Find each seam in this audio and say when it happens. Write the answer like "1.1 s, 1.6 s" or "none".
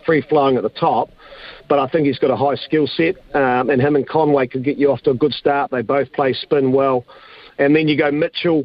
none